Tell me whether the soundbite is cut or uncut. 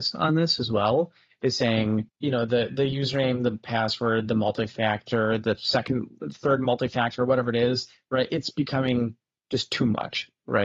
uncut